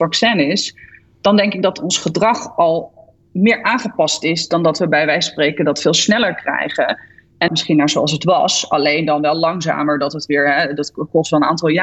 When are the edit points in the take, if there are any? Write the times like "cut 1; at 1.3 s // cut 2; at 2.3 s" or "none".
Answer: cut 1; at 7.5 s